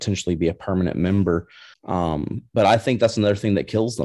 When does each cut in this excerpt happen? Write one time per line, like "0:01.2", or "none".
0:01.7